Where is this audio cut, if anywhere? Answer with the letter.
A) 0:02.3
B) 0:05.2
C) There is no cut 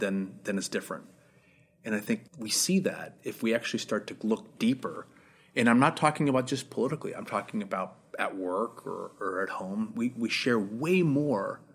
A